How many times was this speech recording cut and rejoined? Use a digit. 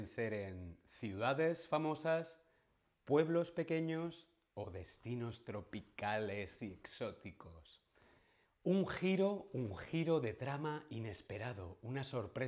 1